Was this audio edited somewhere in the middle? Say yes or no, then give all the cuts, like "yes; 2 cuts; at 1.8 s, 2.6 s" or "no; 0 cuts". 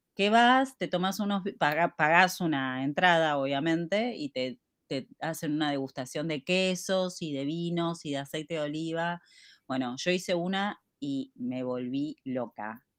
no; 0 cuts